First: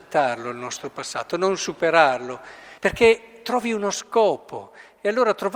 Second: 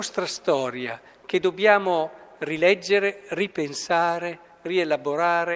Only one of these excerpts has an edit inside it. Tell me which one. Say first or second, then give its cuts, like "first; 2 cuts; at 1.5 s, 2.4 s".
first; 1 cut; at 2.8 s